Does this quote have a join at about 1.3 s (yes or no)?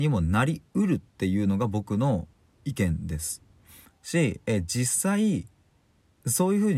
no